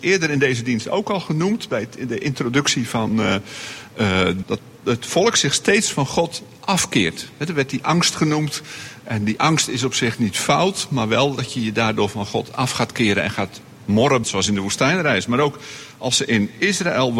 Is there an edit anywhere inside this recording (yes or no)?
yes